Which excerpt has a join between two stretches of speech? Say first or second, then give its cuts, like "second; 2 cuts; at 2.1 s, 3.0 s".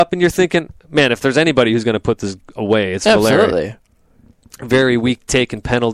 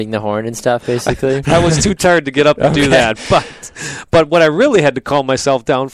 second; 1 cut; at 1.4 s